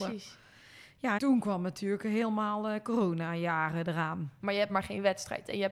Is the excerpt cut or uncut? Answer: cut